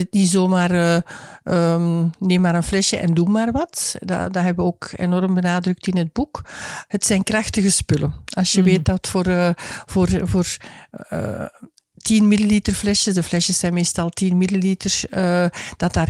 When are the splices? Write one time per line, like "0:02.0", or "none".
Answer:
none